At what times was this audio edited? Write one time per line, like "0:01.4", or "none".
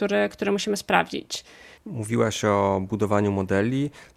0:01.8